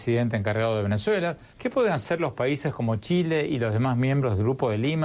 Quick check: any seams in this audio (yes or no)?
yes